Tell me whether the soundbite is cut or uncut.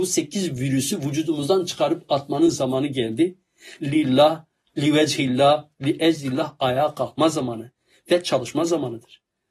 uncut